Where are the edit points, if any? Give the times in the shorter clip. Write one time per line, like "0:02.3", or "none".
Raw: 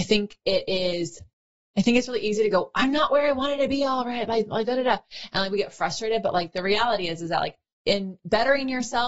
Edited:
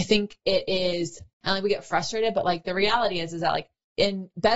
0:01.4